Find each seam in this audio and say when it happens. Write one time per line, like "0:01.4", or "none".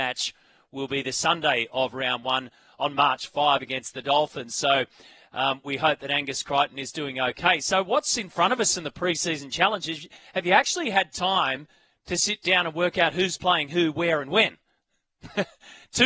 none